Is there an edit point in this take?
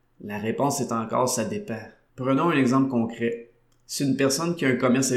yes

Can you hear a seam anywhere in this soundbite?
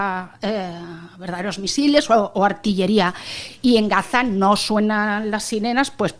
no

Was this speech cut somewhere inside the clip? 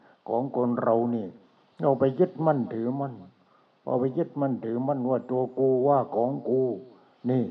no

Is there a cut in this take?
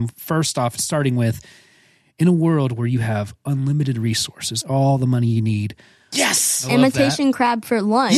yes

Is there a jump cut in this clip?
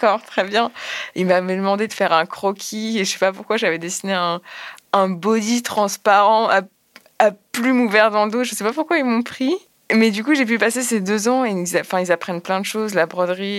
no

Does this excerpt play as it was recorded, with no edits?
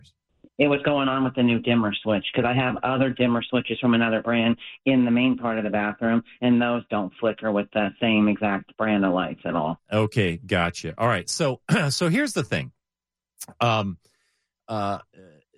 yes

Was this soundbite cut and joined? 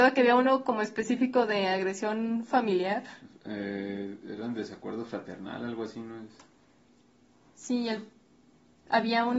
no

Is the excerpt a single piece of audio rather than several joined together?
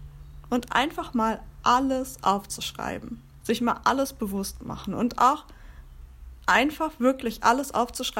no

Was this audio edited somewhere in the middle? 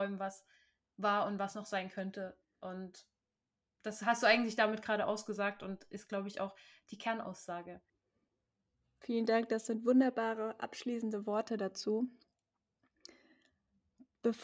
no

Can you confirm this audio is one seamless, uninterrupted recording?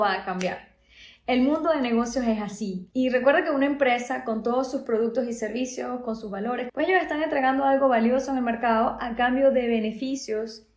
no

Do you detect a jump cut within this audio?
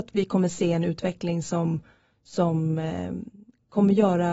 no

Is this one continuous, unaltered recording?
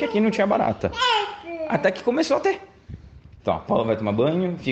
no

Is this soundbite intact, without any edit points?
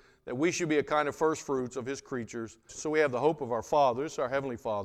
no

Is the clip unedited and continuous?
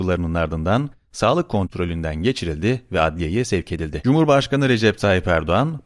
no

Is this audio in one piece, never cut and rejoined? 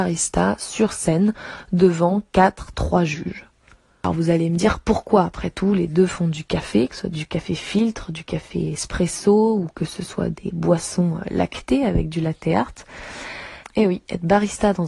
no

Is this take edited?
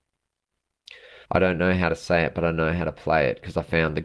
yes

